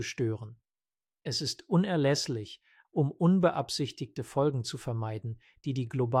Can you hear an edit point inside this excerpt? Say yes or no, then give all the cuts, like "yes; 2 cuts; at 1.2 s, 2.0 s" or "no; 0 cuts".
yes; 2 cuts; at 1.1 s, 2.8 s